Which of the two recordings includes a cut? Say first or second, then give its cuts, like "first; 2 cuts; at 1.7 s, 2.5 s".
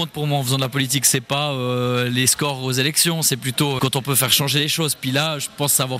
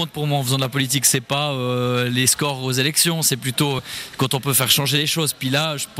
first; 1 cut; at 3.8 s